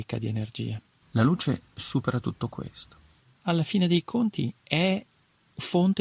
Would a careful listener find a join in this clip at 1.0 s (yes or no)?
yes